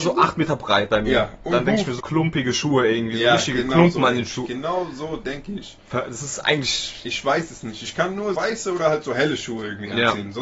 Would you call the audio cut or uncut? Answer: cut